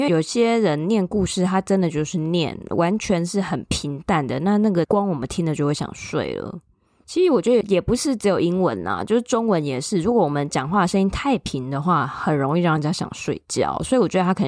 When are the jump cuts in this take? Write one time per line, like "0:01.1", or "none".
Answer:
none